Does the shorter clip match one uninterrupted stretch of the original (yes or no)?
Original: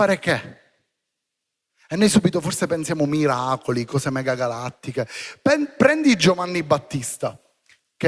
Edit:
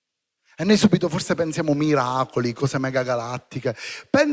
yes